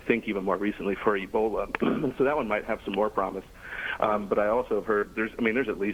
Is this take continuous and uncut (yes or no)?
yes